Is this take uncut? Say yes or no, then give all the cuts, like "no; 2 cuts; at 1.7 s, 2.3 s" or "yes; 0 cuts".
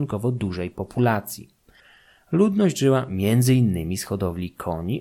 yes; 0 cuts